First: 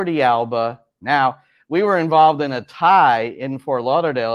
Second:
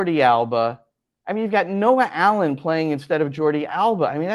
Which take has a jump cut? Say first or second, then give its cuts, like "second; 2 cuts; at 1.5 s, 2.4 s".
first; 1 cut; at 1.0 s